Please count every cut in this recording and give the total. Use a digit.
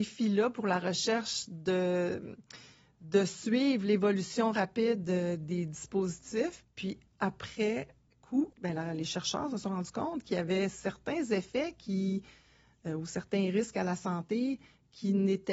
2